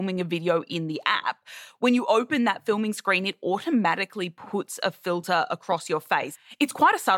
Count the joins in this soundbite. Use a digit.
0